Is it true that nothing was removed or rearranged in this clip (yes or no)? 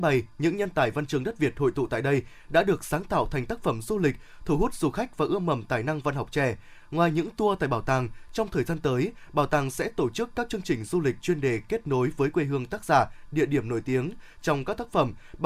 no